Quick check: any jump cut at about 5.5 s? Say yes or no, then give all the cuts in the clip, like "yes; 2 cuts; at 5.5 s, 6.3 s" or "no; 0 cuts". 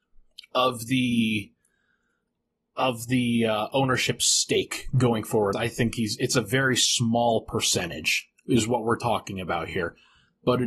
yes; 1 cut; at 5.5 s